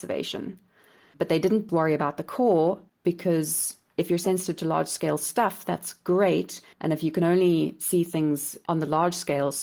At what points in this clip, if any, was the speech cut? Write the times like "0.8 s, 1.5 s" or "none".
1.7 s, 6.7 s